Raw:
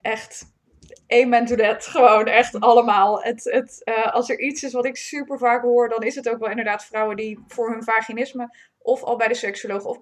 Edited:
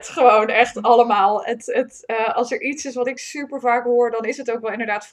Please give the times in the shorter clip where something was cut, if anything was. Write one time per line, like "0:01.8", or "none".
none